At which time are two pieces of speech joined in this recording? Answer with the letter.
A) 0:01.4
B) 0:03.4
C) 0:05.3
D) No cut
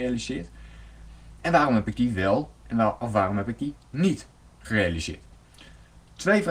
D